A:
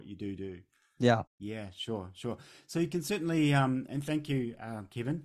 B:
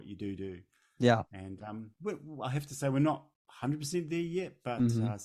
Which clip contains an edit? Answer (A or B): A